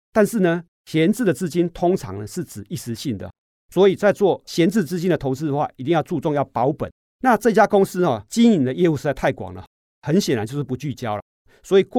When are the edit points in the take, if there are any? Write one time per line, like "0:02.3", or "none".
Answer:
0:07.1